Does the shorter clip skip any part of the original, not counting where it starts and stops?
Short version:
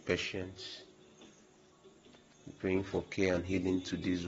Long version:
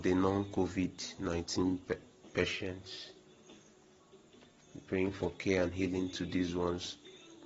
no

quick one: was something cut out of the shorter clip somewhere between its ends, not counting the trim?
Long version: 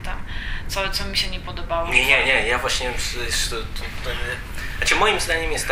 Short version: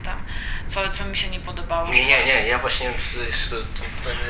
no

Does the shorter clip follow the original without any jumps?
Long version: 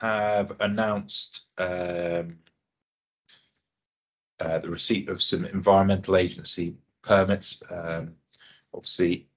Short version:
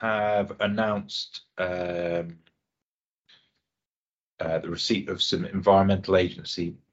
yes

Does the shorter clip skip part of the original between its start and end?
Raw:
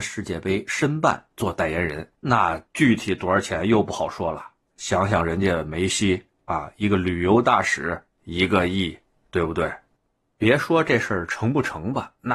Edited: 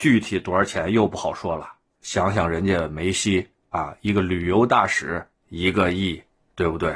no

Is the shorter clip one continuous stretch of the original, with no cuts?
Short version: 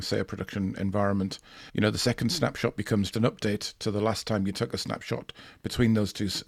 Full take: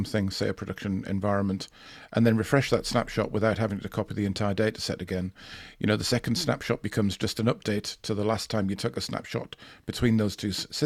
no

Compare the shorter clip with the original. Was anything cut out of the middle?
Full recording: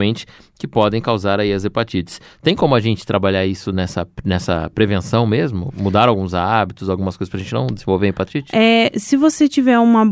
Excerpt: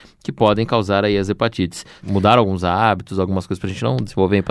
yes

